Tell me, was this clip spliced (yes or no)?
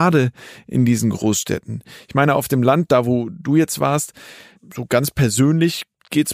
yes